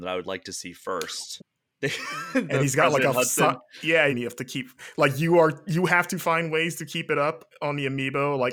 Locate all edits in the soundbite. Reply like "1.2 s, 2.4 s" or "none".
1.4 s, 4.1 s